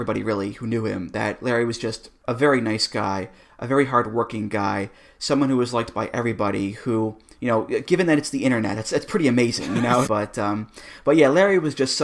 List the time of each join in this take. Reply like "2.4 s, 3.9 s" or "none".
10.1 s